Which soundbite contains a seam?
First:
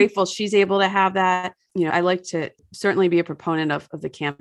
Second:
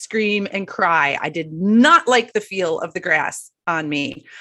first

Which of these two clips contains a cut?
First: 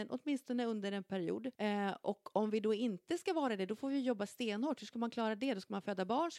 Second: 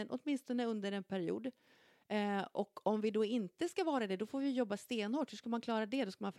first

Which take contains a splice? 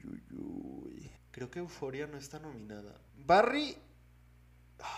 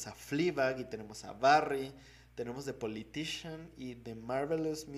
first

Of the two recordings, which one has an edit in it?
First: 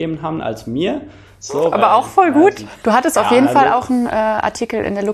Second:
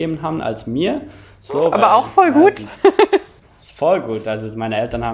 first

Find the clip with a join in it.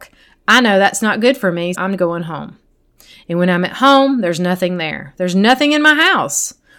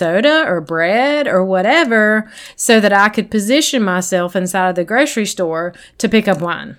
first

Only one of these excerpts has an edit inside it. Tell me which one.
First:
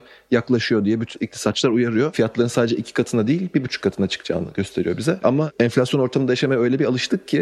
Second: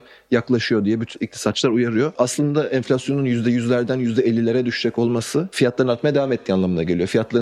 first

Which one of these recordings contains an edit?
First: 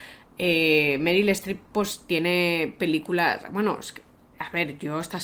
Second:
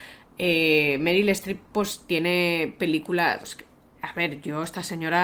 second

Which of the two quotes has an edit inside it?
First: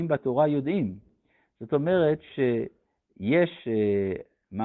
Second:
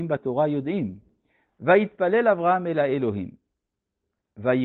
second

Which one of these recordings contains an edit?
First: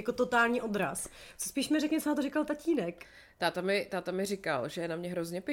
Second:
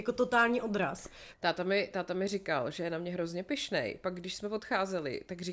second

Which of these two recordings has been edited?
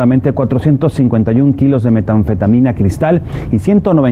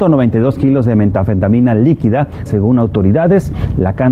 second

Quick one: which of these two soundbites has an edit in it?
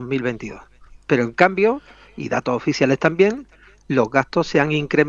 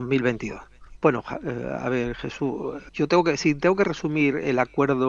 second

